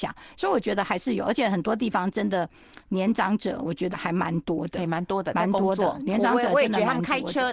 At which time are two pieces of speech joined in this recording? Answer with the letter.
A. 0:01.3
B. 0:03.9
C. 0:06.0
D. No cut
B